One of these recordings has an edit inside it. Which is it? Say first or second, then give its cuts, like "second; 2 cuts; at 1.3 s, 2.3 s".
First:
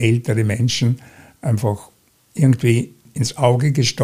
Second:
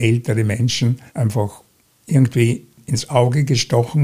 second; 1 cut; at 1.1 s